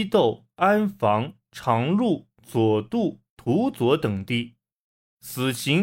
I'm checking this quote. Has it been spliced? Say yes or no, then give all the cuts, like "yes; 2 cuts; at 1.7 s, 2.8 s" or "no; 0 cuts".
yes; 1 cut; at 3.3 s